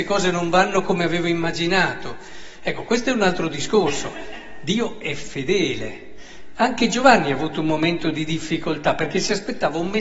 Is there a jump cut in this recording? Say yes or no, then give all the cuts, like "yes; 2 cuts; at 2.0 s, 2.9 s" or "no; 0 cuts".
no; 0 cuts